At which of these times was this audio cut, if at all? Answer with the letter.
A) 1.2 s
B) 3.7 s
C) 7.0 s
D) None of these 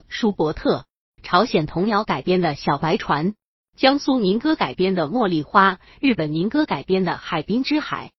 A